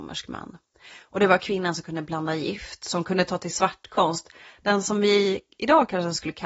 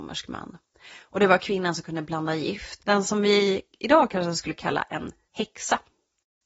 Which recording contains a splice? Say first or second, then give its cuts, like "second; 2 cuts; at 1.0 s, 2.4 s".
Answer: second; 1 cut; at 2.8 s